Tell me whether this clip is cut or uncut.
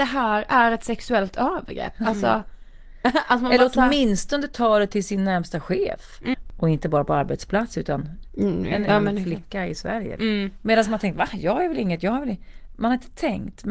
cut